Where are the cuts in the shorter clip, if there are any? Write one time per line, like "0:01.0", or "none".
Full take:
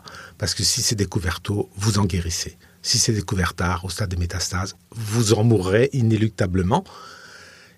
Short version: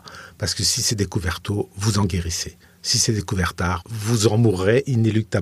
0:03.8